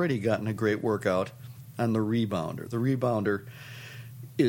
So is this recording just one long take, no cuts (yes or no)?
yes